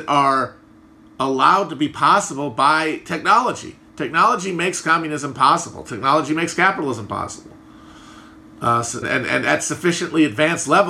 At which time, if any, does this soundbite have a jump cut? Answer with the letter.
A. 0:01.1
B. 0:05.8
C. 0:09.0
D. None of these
C